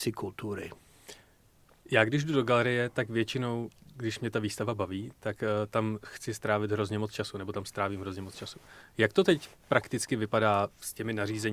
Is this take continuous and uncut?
yes; 0 cuts

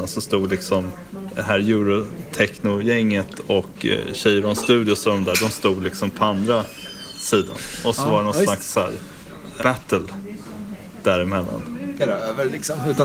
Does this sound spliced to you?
yes; 2 cuts; at 9.6 s, 12.0 s

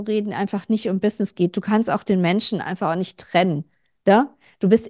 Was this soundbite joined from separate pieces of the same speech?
no; 0 cuts

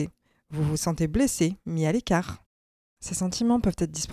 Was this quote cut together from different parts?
no; 0 cuts

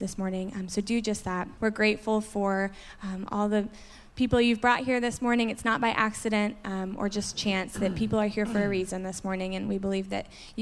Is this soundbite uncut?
no; 1 cut; at 1.6 s

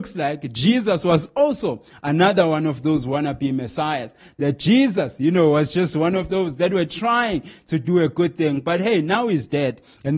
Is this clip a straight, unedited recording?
yes; 0 cuts

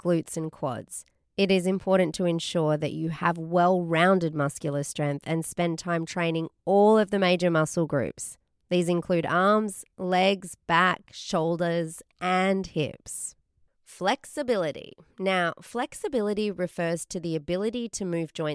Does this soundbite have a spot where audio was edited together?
no; 0 cuts

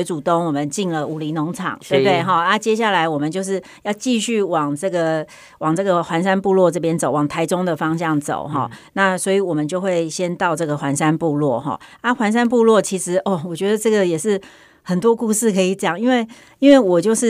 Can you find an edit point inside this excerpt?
no; 0 cuts

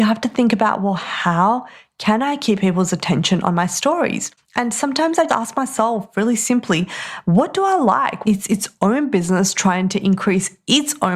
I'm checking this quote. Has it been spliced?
yes; 2 cuts; at 5.3 s, 8.2 s

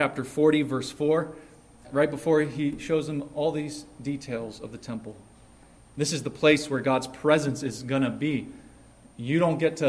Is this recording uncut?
no; 2 cuts; at 1.8 s, 5.8 s

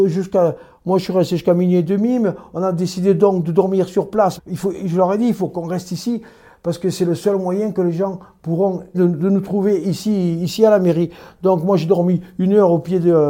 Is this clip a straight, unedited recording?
no; 2 cuts; at 4.4 s, 8.9 s

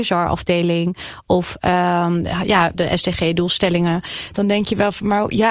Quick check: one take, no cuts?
no; 2 cuts; at 2.7 s, 4.3 s

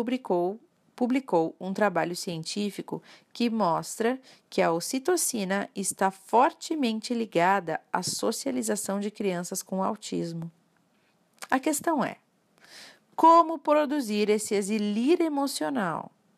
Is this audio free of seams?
yes; 0 cuts

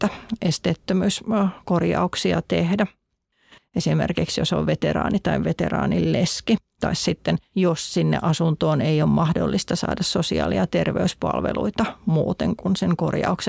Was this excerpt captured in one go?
no; 1 cut; at 3.6 s

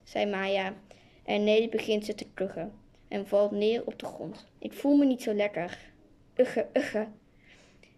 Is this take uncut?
no; 1 cut; at 4.5 s

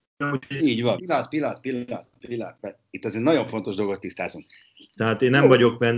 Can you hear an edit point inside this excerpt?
yes; 2 cuts; at 1.0 s, 5.0 s

